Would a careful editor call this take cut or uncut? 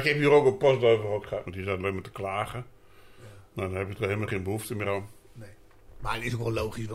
cut